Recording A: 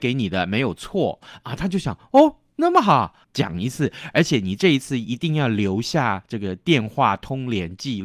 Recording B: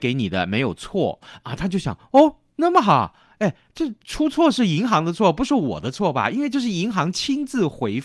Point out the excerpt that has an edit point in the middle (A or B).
A